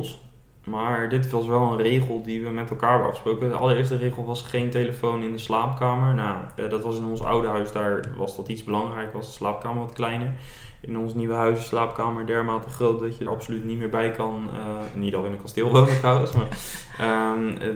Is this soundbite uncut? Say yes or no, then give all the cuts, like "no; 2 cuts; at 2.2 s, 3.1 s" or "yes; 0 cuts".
no; 1 cut; at 13.3 s